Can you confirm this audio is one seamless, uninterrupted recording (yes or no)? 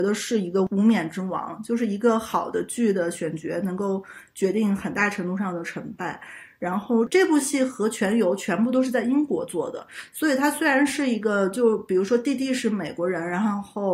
yes